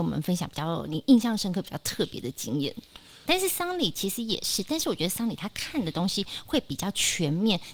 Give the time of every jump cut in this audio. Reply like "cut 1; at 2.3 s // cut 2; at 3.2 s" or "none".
cut 1; at 3.3 s